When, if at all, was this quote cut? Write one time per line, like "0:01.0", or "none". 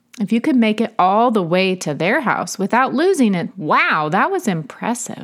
0:03.5